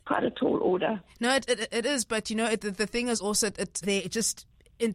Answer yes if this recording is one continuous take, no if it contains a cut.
no